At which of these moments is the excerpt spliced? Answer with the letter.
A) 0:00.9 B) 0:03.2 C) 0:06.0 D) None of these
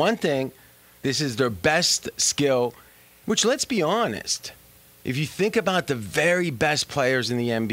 B